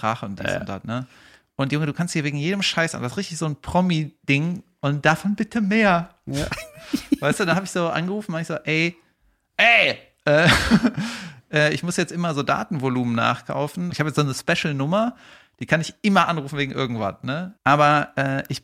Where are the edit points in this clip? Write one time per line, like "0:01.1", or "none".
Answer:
0:13.9
0:17.6